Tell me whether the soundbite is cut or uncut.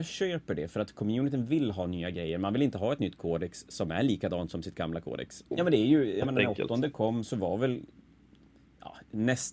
cut